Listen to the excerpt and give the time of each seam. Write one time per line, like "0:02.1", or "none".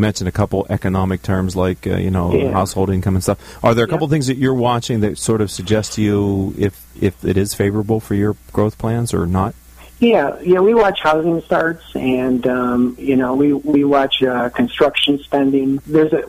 none